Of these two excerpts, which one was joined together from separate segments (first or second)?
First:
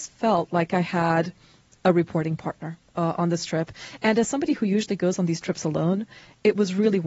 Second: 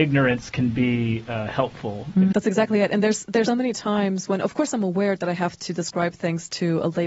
second